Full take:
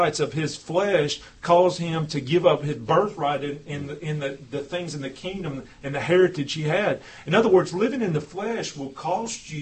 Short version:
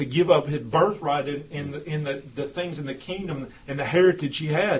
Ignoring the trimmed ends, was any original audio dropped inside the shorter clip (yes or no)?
no